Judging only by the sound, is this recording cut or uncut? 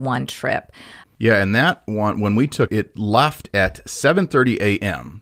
cut